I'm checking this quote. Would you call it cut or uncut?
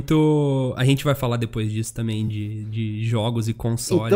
uncut